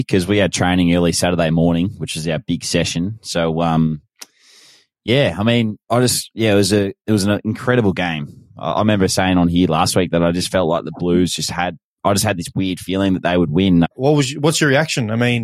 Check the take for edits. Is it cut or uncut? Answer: cut